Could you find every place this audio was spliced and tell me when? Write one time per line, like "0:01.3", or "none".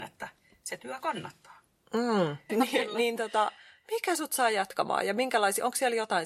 0:02.5